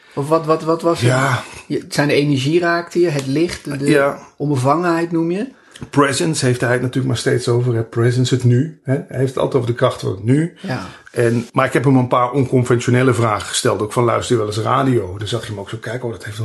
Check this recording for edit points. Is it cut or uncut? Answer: cut